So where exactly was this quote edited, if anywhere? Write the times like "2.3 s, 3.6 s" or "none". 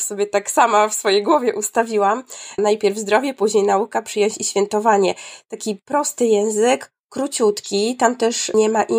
2.6 s